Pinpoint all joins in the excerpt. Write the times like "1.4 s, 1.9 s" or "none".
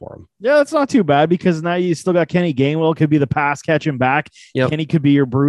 none